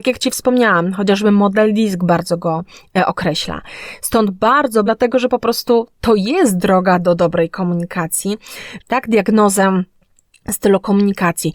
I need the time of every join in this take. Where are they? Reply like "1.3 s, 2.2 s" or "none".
4.9 s, 8.8 s